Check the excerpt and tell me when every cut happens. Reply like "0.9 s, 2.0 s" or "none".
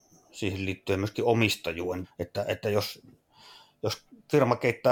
2.0 s